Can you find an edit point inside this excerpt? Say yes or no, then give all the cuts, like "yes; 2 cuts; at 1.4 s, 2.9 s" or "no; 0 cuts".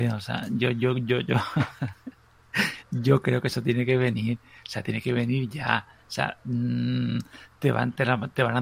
no; 0 cuts